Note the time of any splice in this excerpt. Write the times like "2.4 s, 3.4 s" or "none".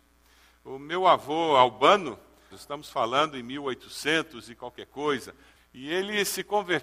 2.5 s, 5.6 s